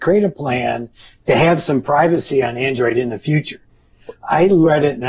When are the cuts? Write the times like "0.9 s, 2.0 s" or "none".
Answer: none